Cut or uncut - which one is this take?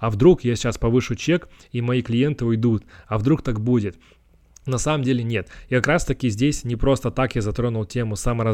uncut